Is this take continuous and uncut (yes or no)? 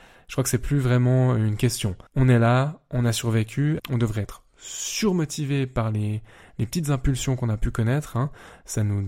no